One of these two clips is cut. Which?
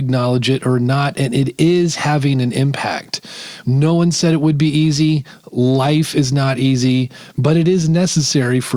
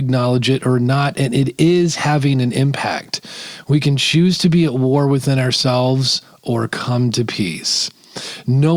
first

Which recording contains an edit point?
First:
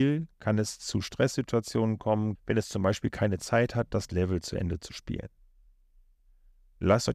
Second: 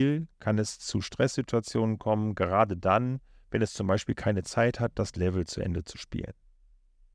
first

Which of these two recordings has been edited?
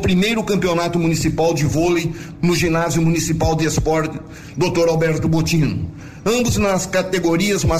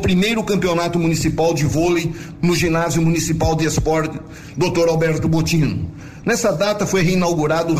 second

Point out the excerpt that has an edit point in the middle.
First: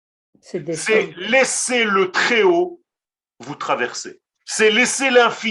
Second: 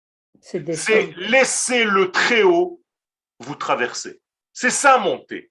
first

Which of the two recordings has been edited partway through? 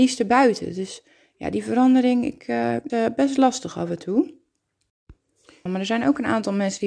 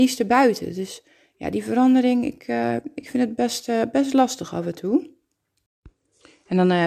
first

